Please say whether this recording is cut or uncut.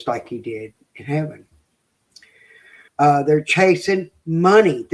cut